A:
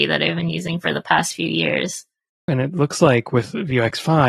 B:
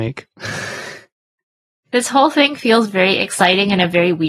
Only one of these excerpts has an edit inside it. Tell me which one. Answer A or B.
A